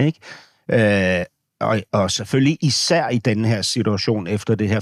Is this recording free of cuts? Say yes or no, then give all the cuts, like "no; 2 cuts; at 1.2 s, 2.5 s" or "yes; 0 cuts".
yes; 0 cuts